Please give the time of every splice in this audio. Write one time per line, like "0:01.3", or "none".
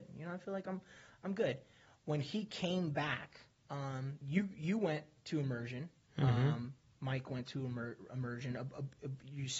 0:04.2